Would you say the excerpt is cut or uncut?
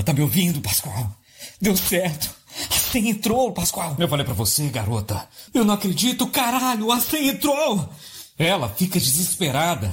cut